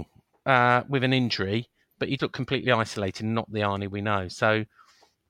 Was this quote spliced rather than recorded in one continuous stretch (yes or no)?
yes